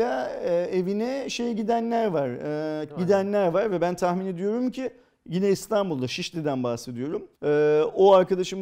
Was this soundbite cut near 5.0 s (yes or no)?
no